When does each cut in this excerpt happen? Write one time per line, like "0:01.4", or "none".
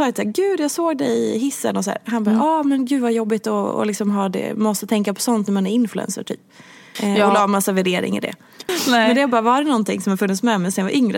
0:07.0
0:08.7